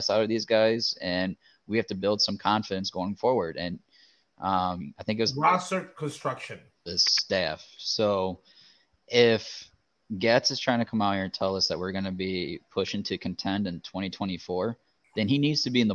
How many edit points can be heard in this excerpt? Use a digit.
2